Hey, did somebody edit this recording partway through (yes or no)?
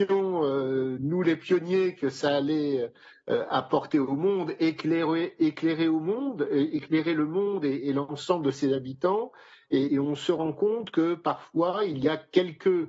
yes